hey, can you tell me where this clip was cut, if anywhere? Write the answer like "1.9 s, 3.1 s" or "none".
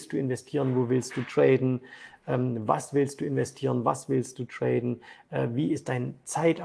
none